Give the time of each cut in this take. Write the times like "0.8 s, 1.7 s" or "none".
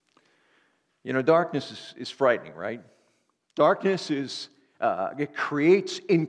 none